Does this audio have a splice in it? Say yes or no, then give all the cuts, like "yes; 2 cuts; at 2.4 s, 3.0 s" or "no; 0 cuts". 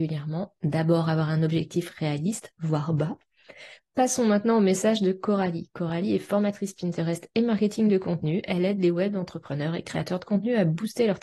yes; 1 cut; at 3.8 s